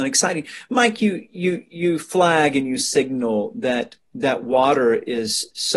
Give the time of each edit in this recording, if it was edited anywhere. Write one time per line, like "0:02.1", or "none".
none